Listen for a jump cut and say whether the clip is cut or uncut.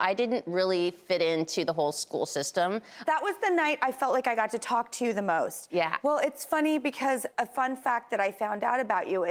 cut